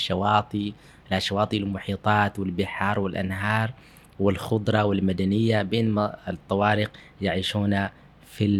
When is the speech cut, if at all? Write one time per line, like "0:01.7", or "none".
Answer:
none